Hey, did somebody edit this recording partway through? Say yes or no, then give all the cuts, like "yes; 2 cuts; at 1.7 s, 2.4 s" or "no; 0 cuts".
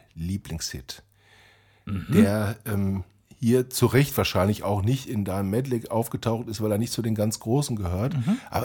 no; 0 cuts